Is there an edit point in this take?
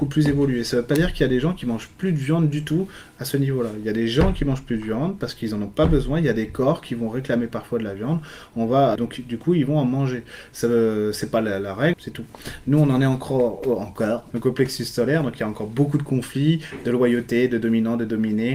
yes; 3 cuts; at 9.0 s, 11.9 s, 14.3 s

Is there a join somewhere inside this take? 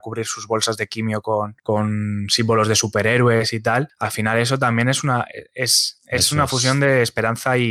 no; 0 cuts

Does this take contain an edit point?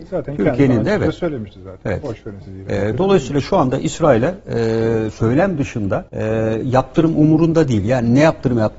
yes; 1 cut; at 6.1 s

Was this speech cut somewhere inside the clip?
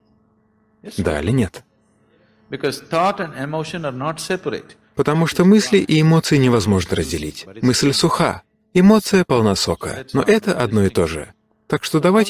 no; 0 cuts

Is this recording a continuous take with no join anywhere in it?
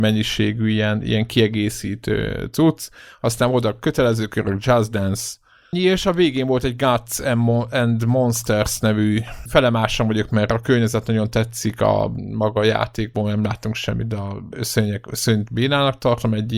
no; 1 cut; at 5.7 s

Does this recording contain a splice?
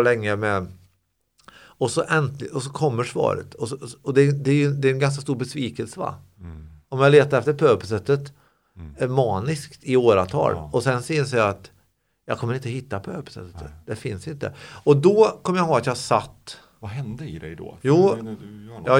no; 0 cuts

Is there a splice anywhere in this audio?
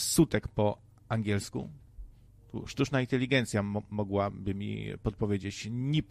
no; 0 cuts

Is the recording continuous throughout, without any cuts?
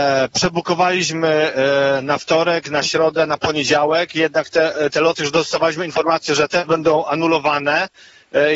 yes; 0 cuts

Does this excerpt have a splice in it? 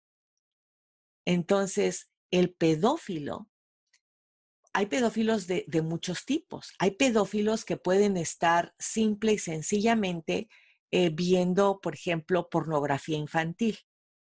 no; 0 cuts

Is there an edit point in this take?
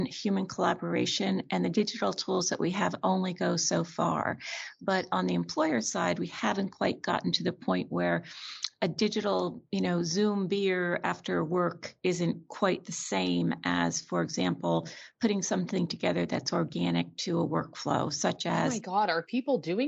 no; 0 cuts

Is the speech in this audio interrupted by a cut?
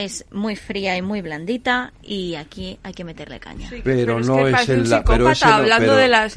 no; 0 cuts

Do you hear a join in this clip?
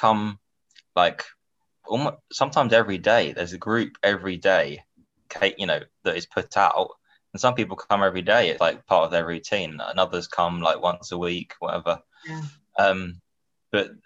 yes; 1 cut; at 8.6 s

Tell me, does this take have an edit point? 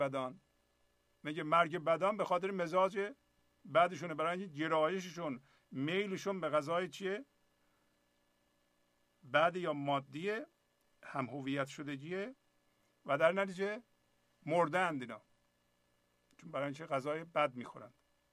no; 0 cuts

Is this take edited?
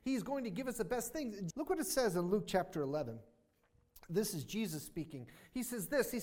yes; 1 cut; at 1.5 s

